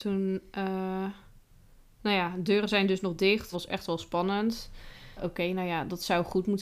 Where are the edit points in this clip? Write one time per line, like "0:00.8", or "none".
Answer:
0:03.5
0:05.2